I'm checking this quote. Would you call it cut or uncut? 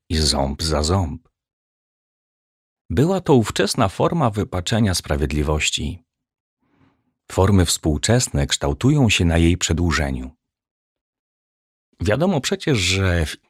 uncut